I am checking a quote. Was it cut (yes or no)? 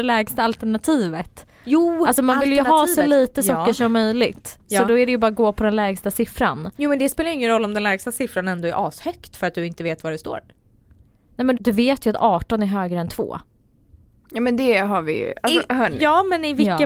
yes